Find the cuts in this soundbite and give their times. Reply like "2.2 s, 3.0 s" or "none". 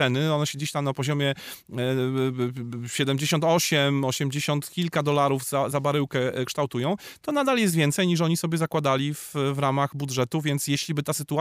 none